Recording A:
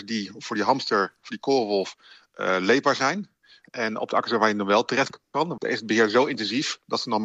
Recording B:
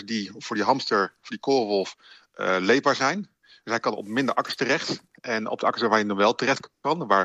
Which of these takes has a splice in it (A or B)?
A